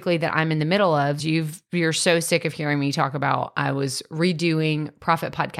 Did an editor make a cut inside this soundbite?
yes; 1 cut; at 1.2 s

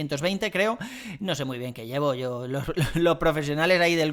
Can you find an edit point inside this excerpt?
no; 0 cuts

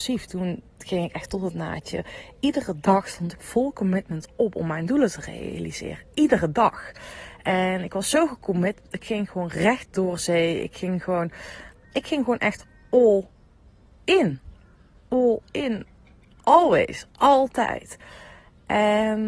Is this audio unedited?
no; 1 cut; at 11.8 s

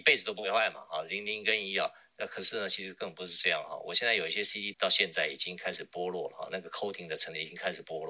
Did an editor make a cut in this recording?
yes; 1 cut; at 4.7 s

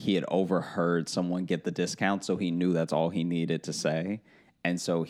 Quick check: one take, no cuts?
yes; 0 cuts

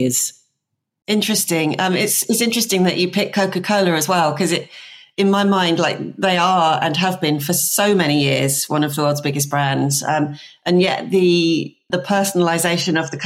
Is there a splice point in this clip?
yes; 1 cut; at 11.9 s

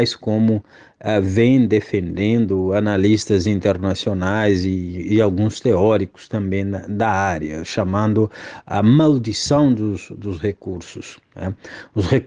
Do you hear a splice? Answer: no; 0 cuts

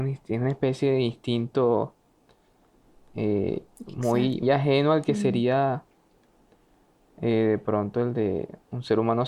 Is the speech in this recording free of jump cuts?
no; 1 cut; at 4.4 s

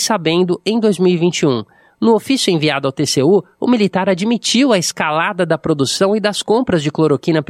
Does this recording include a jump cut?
no; 0 cuts

